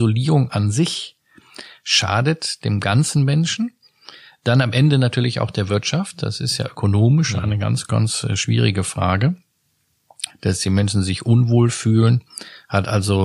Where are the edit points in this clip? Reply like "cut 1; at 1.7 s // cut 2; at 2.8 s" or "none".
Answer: cut 1; at 10.3 s

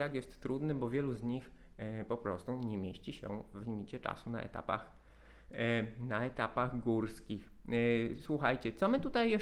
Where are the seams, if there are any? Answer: none

